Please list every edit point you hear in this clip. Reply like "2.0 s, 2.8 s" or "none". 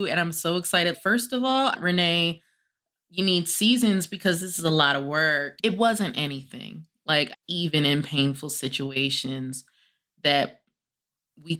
1.7 s, 5.6 s, 7.3 s